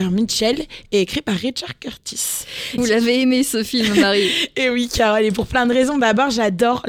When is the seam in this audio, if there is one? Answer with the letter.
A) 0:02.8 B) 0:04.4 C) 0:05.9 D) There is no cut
A